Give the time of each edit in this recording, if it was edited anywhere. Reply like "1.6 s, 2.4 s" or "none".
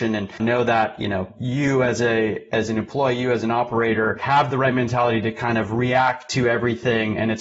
none